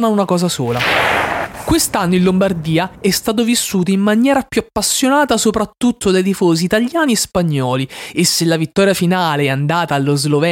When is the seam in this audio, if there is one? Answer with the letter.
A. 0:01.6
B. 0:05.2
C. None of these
C